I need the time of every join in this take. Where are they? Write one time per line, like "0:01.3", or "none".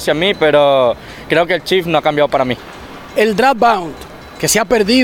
none